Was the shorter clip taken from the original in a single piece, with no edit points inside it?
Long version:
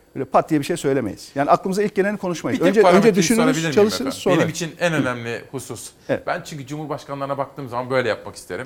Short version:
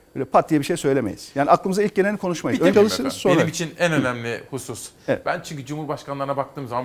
no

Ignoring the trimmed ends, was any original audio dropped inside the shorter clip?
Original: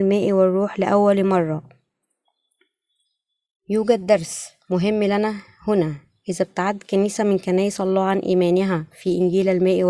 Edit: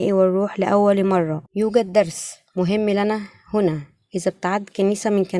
yes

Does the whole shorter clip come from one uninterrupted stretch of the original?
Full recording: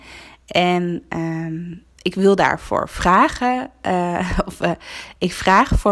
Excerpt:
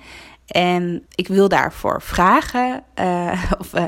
no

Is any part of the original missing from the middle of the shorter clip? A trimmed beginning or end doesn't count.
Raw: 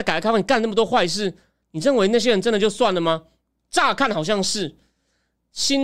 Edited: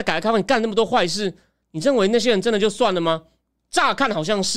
no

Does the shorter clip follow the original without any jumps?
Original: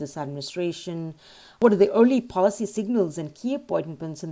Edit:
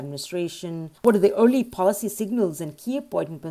no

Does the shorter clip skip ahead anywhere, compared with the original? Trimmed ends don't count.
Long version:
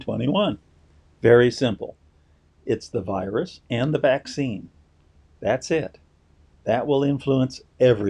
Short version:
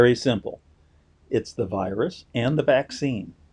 no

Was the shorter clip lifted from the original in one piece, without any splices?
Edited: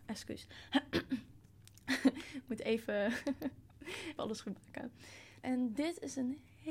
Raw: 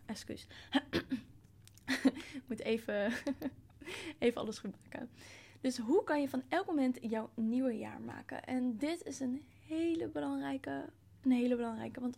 no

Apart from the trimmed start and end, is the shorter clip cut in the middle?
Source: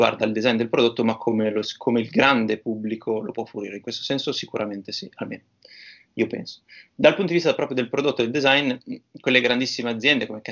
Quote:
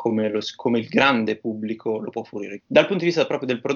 yes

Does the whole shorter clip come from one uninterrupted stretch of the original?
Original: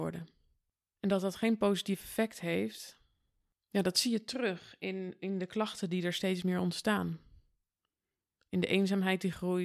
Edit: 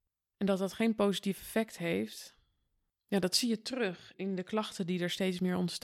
no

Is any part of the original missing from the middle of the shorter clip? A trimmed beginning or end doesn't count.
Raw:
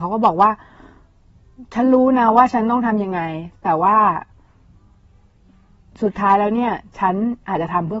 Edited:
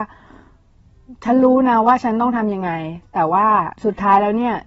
yes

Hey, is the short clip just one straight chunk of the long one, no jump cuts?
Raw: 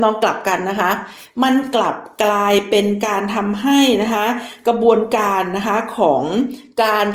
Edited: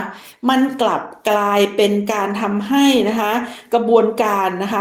yes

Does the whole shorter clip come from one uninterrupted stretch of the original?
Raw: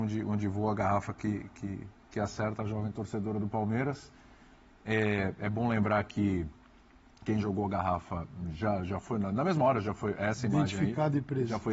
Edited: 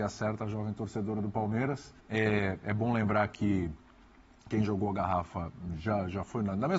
no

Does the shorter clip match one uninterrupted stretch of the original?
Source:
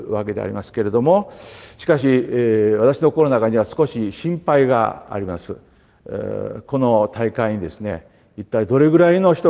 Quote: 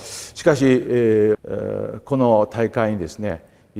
no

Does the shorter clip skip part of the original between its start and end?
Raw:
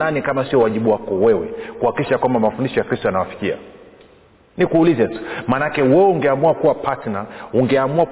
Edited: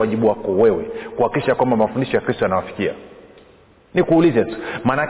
no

